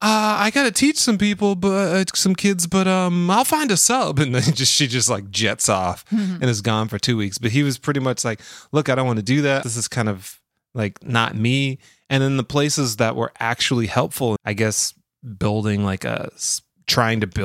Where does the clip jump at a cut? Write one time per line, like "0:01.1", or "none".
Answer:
0:09.6
0:14.4